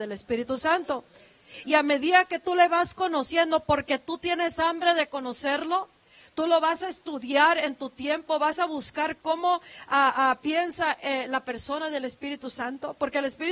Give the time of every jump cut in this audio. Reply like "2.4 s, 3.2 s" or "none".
none